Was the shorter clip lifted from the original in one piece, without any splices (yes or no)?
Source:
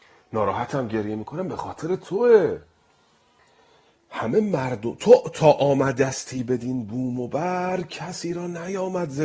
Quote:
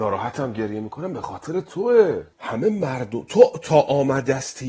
no